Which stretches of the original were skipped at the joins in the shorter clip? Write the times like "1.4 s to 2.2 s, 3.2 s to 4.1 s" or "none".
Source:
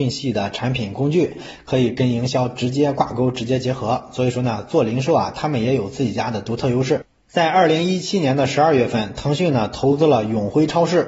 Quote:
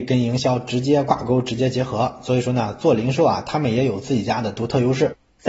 none